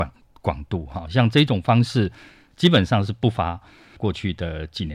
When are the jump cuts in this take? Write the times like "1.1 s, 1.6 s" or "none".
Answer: 4.0 s